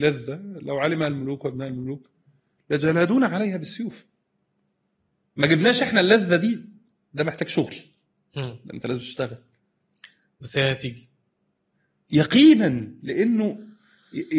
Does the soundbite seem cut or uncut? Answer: uncut